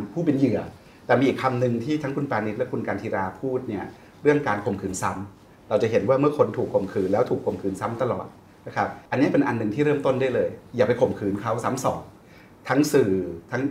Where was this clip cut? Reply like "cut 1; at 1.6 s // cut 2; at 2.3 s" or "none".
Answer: cut 1; at 9.1 s